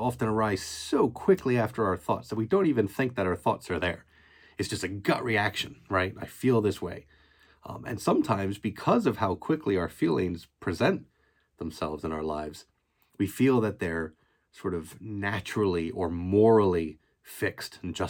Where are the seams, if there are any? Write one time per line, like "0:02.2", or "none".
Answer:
none